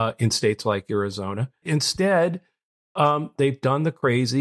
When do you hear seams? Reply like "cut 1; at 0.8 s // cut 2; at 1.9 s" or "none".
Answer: cut 1; at 1.6 s // cut 2; at 3.4 s